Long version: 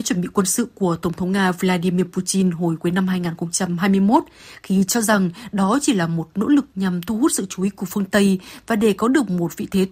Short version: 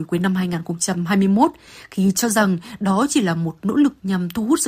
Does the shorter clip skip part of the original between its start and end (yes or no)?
no